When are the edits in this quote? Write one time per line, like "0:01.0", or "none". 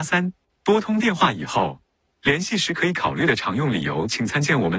0:02.1